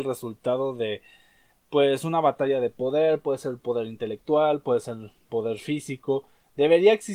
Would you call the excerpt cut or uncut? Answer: uncut